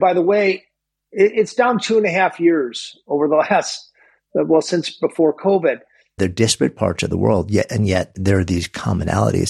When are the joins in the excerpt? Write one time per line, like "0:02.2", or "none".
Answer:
0:06.2